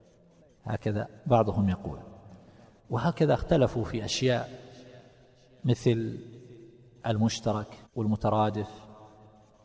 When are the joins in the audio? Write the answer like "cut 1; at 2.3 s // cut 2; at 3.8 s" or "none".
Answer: cut 1; at 7.9 s

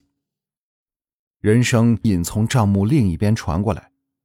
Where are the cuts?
cut 1; at 2.0 s

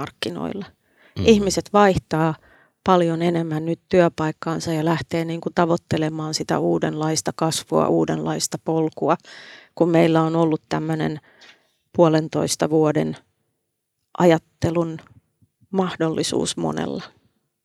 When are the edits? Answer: none

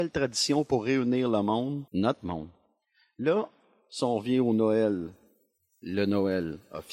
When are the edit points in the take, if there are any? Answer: cut 1; at 1.9 s

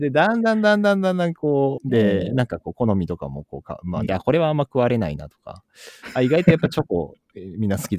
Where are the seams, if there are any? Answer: cut 1; at 1.8 s // cut 2; at 4.1 s

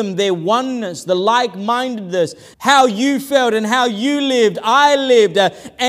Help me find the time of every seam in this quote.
cut 1; at 2.5 s

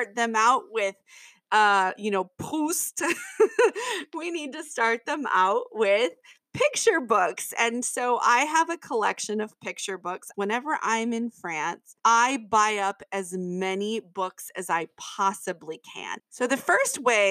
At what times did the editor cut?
cut 1; at 10.3 s // cut 2; at 12.0 s // cut 3; at 16.2 s

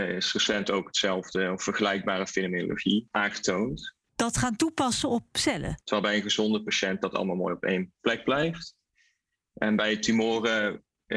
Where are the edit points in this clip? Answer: cut 1; at 4.1 s // cut 2; at 5.8 s

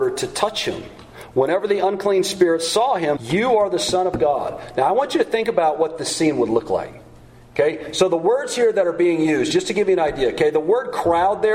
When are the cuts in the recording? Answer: cut 1; at 3.2 s

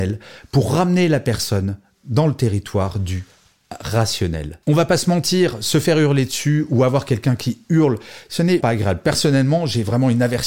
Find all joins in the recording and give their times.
cut 1; at 8.6 s

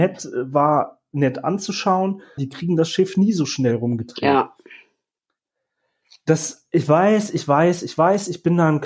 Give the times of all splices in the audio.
cut 1; at 2.4 s

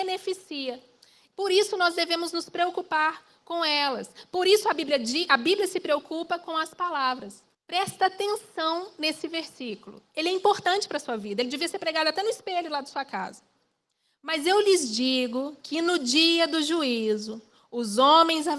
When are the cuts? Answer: cut 1; at 1.3 s // cut 2; at 7.5 s

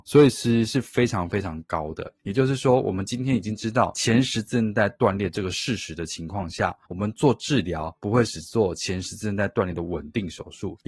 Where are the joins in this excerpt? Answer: cut 1; at 2.2 s

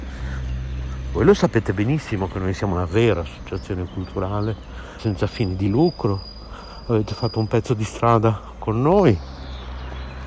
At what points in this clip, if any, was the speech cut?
cut 1; at 5.0 s

